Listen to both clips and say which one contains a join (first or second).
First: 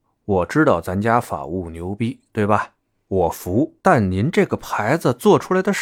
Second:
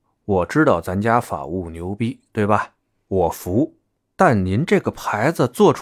first